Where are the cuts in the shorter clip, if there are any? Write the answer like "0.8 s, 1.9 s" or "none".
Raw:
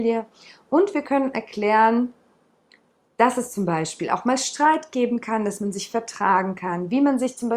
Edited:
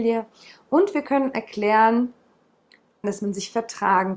3.0 s